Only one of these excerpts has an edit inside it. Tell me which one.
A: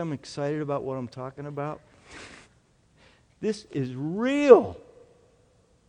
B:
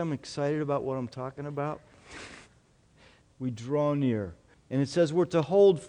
B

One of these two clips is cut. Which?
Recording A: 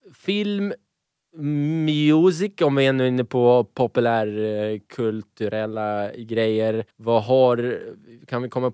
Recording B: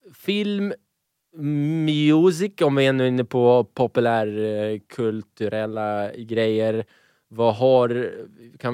A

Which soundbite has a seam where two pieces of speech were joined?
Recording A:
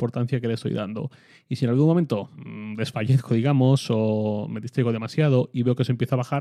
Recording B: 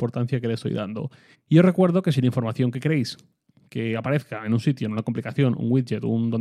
B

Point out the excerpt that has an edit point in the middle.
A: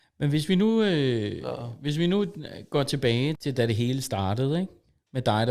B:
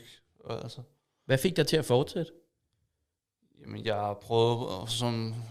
A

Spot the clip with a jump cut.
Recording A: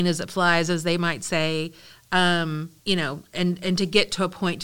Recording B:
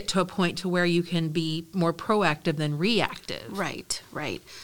A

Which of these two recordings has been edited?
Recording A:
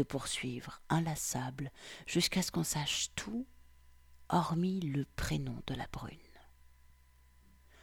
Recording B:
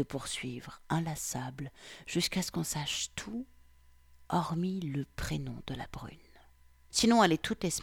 B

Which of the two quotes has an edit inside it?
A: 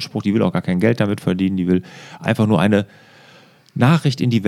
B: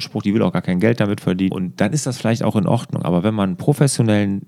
B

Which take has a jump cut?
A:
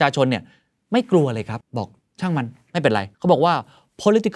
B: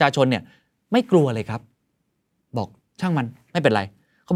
A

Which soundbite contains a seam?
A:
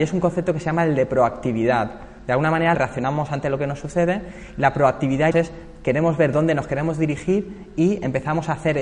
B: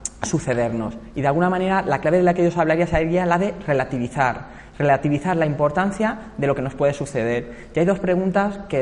A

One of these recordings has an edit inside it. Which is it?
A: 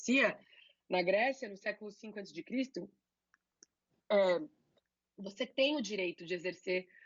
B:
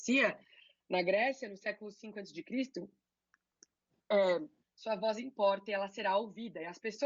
B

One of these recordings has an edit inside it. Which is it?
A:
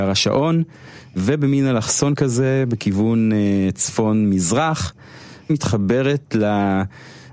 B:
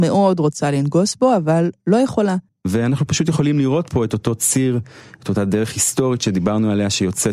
B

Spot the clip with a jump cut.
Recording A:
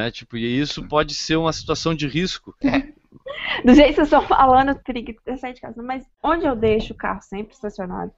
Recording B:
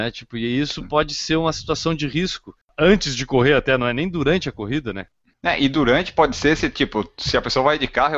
A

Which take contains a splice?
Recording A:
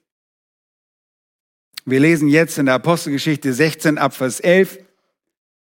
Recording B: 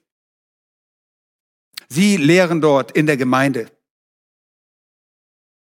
B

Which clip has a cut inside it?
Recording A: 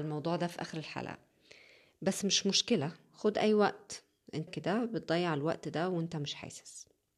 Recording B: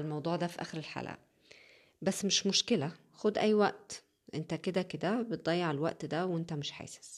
A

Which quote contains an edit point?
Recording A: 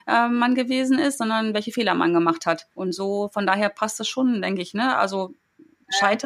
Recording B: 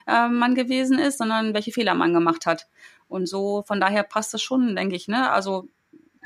A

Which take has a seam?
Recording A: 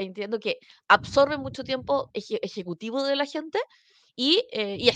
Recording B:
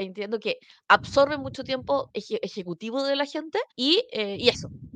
B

